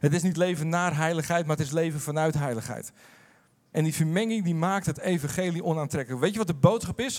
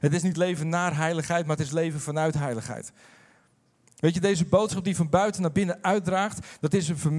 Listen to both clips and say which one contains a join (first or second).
first